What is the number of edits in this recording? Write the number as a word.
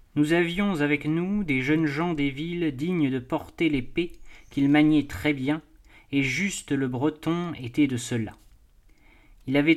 zero